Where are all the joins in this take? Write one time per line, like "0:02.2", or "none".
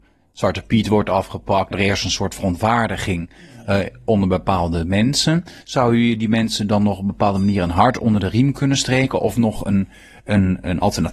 0:01.7